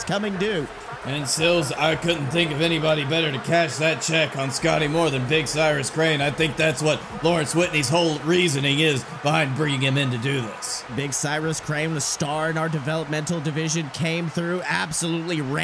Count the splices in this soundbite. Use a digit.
2